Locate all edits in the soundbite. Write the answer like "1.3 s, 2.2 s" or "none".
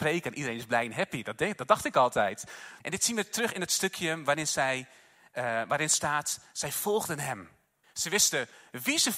2.8 s, 7.8 s